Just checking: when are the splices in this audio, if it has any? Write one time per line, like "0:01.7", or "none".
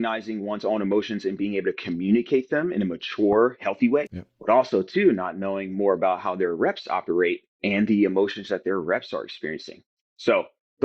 0:04.1
0:07.5

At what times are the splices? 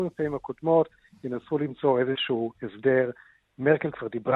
none

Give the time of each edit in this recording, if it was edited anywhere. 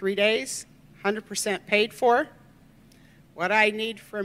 none

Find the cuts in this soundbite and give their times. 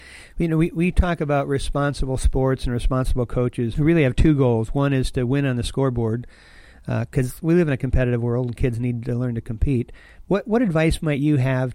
0:03.7
0:10.2

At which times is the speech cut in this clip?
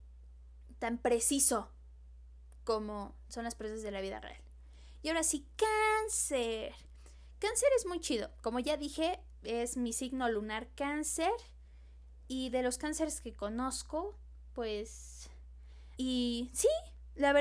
0:16.0

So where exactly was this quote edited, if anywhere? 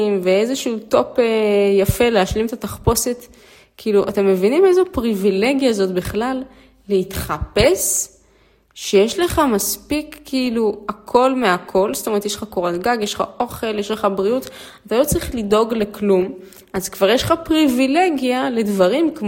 none

